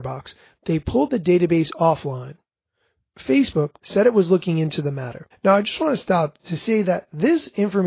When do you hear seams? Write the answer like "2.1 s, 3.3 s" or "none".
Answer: 3.8 s, 5.3 s